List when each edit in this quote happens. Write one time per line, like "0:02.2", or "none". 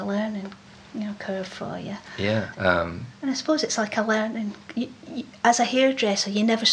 0:02.5